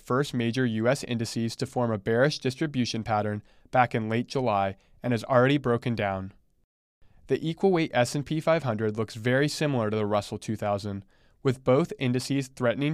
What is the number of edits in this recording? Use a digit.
0